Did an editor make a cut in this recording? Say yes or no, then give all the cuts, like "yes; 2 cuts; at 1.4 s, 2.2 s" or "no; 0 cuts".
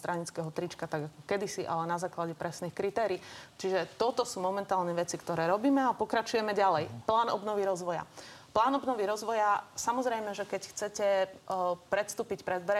no; 0 cuts